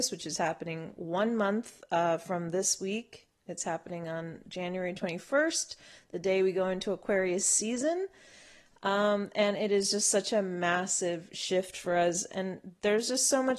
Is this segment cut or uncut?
uncut